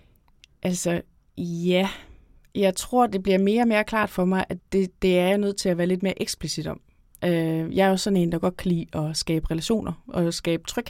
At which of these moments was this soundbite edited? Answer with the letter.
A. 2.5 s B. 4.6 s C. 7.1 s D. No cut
B